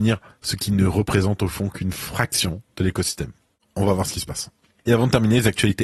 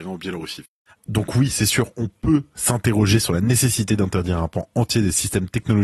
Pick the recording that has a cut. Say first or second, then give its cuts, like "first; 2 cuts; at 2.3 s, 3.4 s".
second; 1 cut; at 1.0 s